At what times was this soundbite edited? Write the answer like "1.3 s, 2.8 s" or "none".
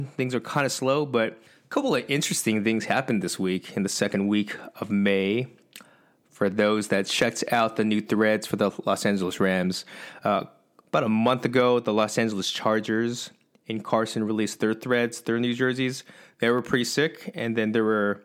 none

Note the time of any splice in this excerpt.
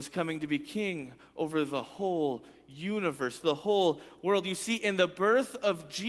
3.4 s

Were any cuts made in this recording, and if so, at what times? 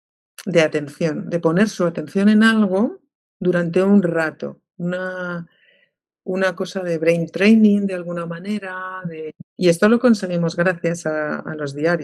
9.5 s

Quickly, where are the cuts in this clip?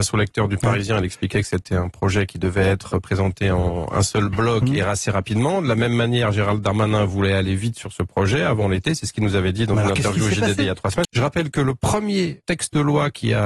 11.0 s, 12.4 s

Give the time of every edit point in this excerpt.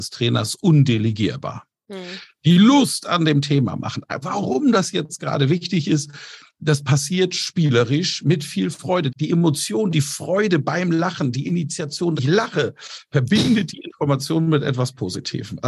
4.2 s, 9.1 s, 12.2 s

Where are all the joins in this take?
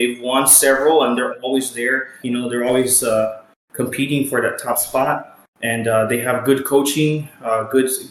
2.2 s

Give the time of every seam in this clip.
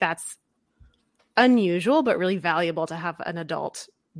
none

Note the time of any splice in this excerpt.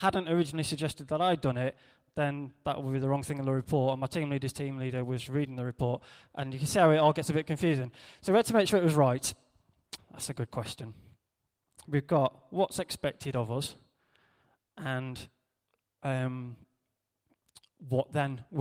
10.0 s, 11.8 s

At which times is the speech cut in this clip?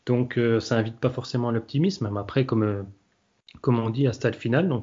none

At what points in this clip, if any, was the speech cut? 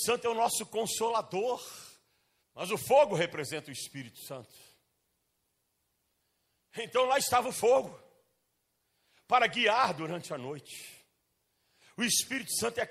2.4 s

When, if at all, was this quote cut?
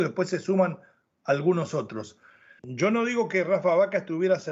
2.6 s

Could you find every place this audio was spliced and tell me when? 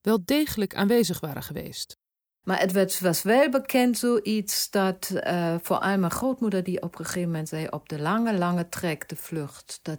2.4 s

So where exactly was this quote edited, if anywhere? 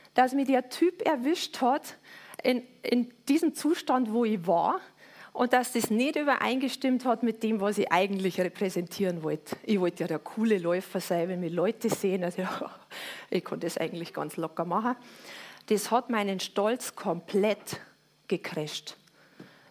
none

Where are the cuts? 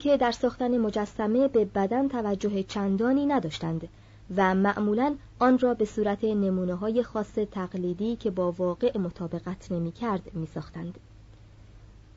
none

